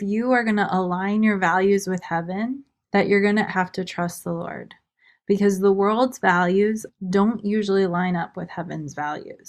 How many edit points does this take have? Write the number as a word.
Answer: one